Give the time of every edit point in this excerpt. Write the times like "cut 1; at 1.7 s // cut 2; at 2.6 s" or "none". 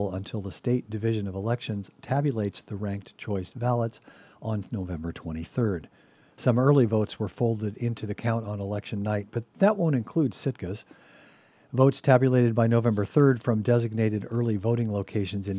cut 1; at 6.3 s